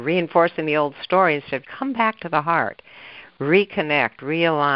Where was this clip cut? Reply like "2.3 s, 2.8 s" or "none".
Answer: 1.6 s

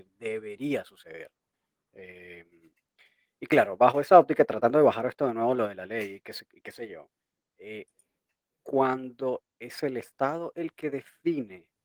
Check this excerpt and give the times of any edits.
none

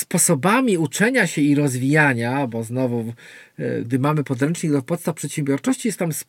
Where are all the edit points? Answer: 3.8 s

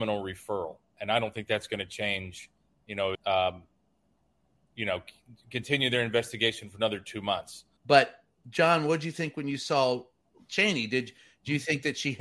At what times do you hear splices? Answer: 3.2 s, 7.8 s

